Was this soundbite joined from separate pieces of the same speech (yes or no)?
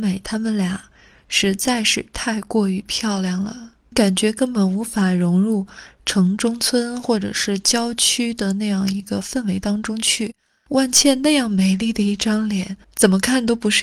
no